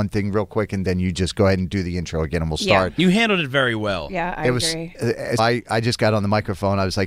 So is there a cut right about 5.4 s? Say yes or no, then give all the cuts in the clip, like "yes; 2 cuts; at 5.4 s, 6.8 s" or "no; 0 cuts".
yes; 1 cut; at 5.4 s